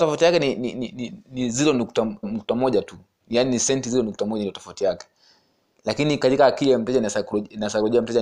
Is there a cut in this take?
yes; 1 cut; at 2.2 s

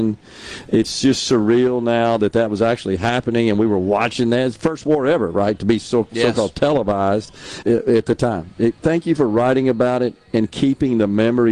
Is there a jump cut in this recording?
yes; 1 cut; at 7.6 s

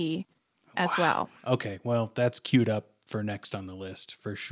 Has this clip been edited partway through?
no; 0 cuts

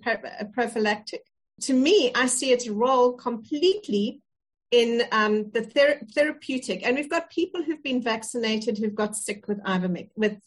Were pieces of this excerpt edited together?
yes; 1 cut; at 1.6 s

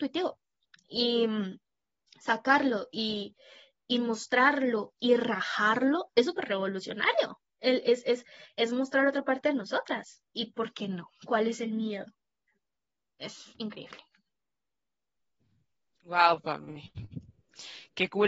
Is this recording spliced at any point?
no; 0 cuts

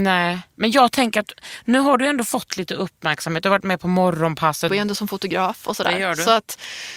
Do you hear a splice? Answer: yes; 1 cut; at 4.7 s

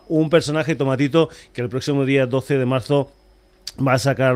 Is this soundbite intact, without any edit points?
yes; 0 cuts

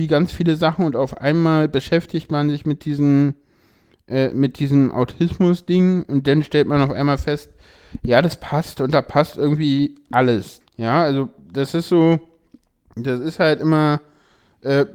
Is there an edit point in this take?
yes; 1 cut; at 10.6 s

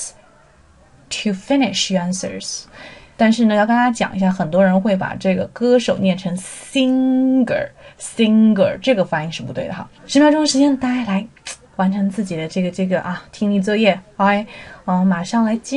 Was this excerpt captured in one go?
no; 2 cuts; at 3.2 s, 9.9 s

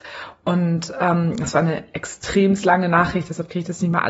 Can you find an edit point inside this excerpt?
no; 0 cuts

